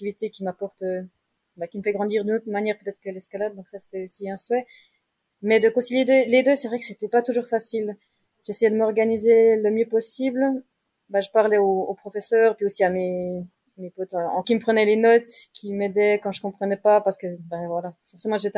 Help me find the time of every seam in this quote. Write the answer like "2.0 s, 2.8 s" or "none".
14.4 s